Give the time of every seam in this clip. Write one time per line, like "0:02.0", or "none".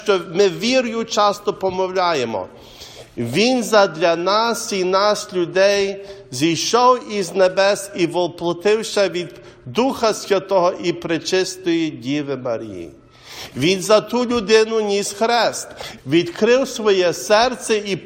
0:13.5
0:16.0